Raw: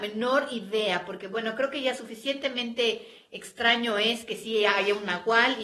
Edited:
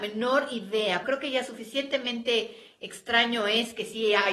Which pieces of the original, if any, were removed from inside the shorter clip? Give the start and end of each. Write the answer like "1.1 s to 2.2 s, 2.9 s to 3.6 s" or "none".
1.0 s to 1.5 s